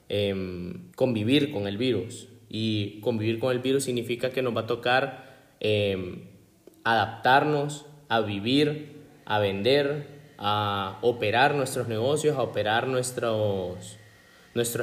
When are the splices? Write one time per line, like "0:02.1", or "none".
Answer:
0:00.9